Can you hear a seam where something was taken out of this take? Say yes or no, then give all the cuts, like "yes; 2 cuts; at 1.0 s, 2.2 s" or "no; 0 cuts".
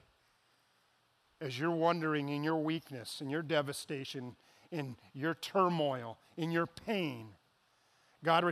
no; 0 cuts